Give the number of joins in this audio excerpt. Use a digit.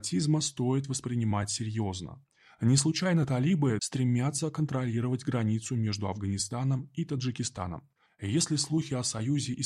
2